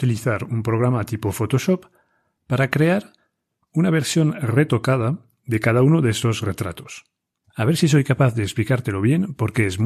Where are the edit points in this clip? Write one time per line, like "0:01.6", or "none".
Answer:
0:07.4